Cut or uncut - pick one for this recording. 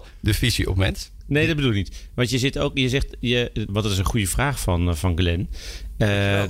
cut